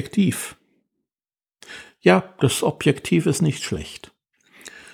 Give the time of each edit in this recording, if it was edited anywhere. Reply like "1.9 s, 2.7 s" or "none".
none

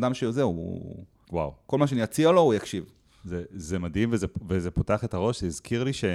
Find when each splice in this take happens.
1.2 s

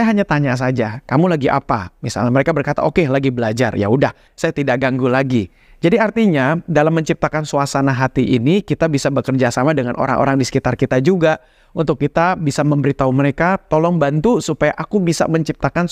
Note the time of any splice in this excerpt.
4.3 s

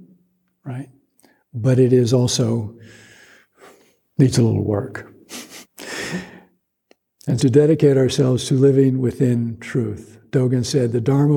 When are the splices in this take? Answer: 5.6 s, 7.4 s

